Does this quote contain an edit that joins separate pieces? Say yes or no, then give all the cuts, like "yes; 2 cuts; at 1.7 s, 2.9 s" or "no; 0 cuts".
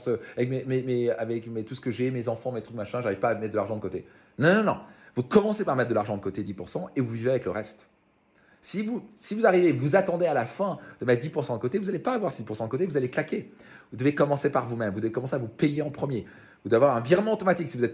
no; 0 cuts